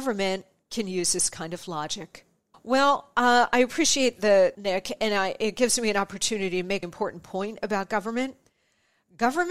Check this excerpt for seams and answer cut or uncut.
cut